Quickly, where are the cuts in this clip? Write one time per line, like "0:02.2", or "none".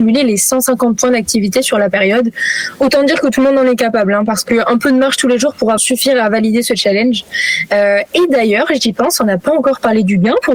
0:05.8